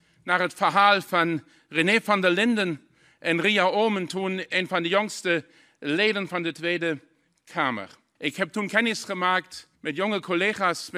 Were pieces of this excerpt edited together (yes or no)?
yes